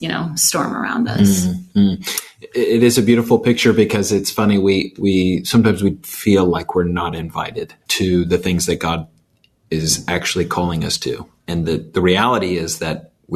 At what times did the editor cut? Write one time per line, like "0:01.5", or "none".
0:07.8